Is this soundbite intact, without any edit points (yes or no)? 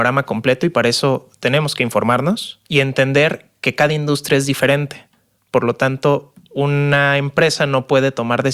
no